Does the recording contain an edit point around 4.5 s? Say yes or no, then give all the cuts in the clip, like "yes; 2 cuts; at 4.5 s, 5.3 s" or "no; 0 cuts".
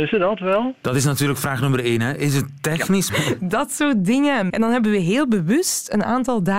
yes; 2 cuts; at 3.1 s, 4.5 s